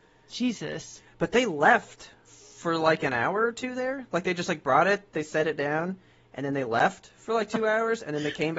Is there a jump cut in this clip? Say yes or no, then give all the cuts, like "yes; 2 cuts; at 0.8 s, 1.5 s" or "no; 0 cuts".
no; 0 cuts